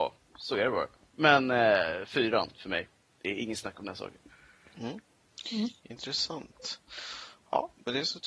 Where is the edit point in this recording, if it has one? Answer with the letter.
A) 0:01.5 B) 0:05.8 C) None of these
C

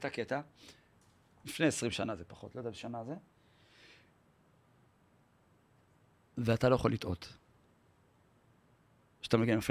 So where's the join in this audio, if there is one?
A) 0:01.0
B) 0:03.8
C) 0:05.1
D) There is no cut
D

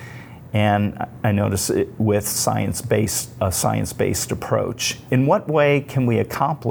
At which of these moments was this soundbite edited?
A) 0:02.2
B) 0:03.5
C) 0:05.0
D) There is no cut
D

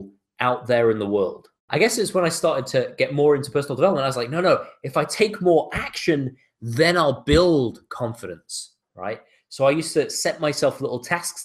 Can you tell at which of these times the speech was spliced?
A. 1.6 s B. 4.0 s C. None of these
A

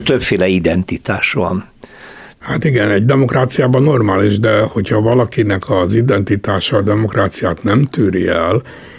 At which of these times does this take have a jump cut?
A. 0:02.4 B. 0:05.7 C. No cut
A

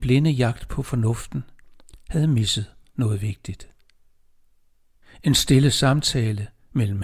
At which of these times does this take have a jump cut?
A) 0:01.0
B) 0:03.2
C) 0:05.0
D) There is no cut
C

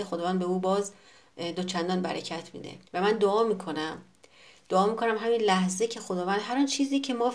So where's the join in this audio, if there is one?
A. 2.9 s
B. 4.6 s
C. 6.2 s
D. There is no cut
A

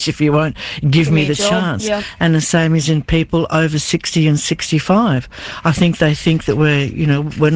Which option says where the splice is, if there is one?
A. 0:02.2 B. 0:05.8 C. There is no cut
C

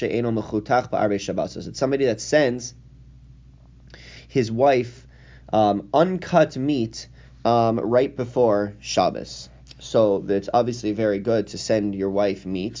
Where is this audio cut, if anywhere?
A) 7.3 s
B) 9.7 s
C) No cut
C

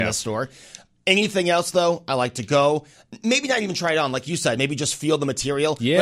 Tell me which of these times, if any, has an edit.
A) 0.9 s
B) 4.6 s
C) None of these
C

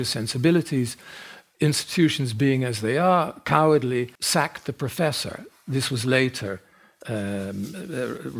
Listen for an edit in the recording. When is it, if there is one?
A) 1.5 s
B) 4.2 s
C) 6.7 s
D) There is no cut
B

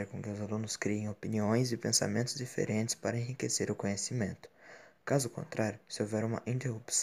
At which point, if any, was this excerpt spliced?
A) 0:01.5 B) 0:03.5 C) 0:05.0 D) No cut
D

